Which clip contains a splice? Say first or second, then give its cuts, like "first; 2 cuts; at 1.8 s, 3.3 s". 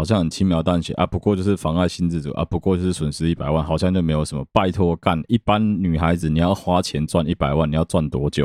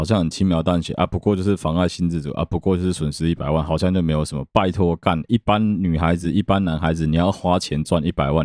first; 1 cut; at 6.2 s